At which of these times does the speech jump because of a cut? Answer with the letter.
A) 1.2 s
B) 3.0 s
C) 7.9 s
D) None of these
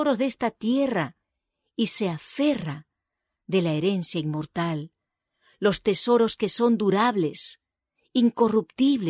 D